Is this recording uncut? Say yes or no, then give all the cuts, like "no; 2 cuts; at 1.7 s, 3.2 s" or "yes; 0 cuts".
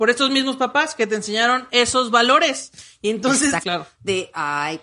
no; 1 cut; at 3.6 s